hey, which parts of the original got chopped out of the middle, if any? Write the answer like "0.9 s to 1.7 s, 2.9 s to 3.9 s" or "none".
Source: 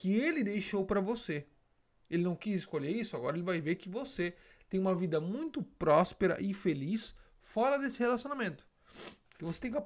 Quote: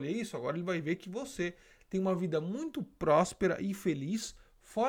none